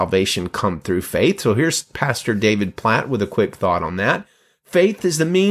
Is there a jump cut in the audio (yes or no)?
no